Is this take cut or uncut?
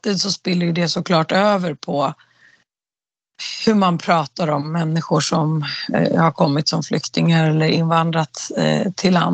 uncut